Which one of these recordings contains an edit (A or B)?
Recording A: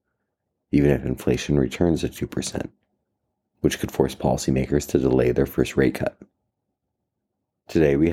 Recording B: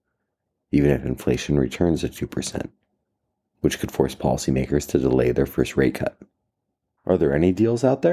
B